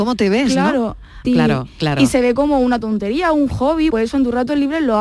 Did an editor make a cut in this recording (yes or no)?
yes